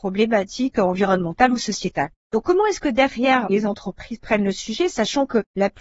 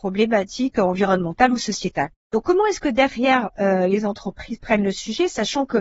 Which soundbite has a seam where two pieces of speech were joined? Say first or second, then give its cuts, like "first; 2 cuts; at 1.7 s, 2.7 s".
first; 1 cut; at 3.5 s